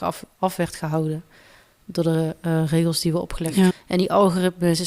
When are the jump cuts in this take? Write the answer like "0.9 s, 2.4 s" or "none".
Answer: 3.7 s